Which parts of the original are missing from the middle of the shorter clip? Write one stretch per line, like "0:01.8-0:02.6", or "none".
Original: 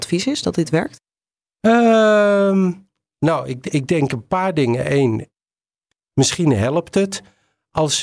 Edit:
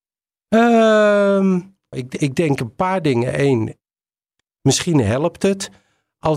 0:03.0-0:03.4